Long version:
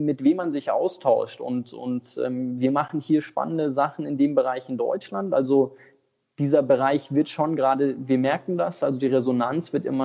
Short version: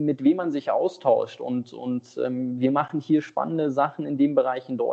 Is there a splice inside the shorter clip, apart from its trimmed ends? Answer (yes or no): no